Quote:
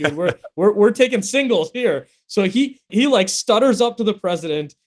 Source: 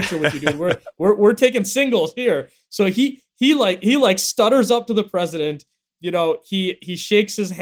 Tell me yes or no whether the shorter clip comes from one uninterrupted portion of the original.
no